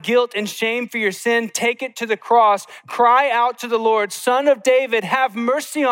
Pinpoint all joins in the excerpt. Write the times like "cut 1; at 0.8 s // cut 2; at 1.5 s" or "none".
none